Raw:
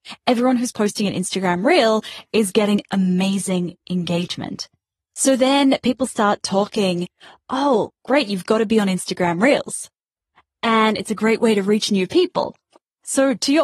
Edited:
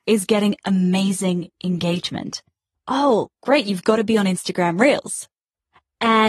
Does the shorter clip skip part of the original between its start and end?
yes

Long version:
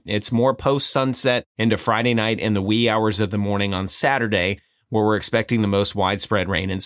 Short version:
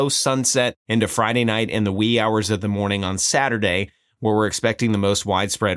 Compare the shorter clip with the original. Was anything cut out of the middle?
no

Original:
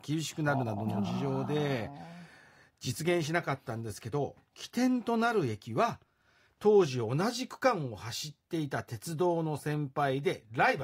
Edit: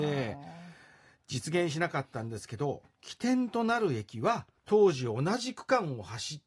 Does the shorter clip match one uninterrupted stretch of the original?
no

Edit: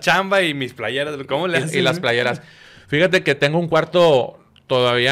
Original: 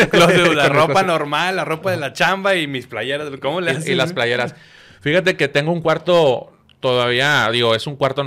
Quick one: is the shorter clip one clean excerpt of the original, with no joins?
yes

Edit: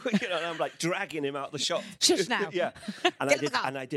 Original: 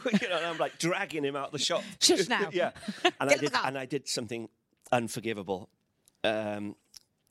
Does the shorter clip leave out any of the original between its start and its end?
no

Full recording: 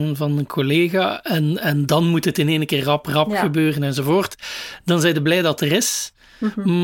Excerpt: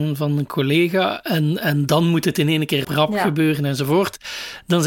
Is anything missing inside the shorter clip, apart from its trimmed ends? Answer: yes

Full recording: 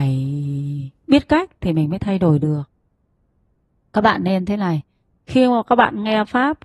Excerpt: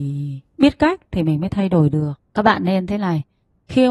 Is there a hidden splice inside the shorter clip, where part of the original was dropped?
yes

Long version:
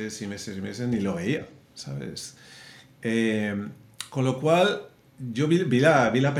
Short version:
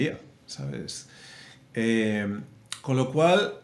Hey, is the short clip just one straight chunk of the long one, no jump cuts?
yes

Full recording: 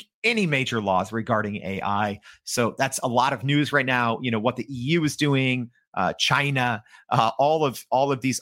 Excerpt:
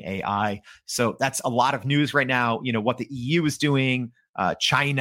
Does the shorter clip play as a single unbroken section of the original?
yes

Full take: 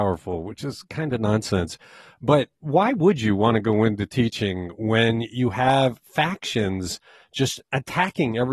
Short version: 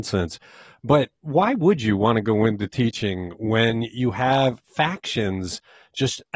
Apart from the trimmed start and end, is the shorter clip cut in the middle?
no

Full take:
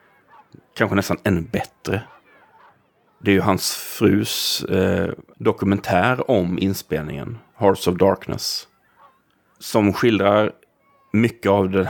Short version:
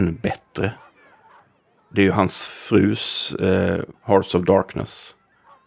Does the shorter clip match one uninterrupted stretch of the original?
no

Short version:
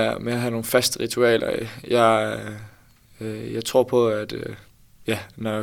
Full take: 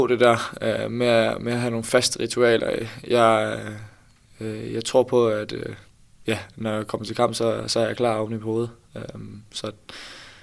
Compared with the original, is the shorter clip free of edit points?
yes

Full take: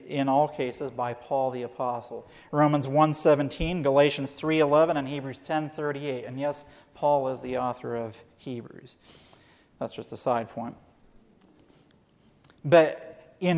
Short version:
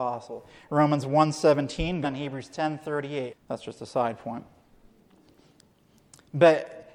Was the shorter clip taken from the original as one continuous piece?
no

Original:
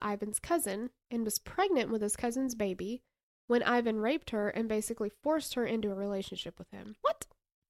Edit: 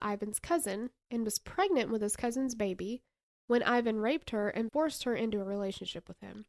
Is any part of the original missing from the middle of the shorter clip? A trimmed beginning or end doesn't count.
yes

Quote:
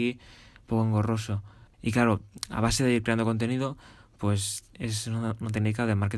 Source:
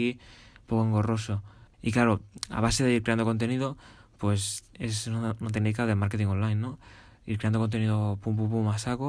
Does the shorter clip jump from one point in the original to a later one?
no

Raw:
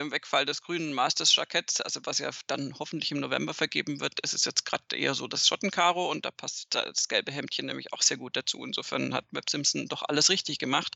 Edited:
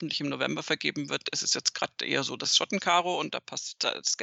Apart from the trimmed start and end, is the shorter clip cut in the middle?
no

